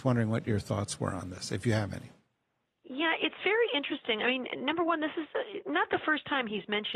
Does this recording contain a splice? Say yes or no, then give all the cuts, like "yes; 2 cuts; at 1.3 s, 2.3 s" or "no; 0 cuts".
no; 0 cuts